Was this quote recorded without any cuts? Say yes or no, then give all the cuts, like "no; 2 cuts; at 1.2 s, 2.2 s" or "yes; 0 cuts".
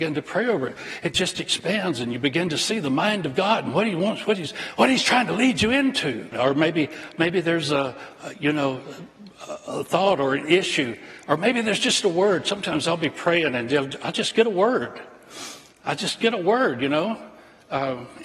no; 1 cut; at 6.3 s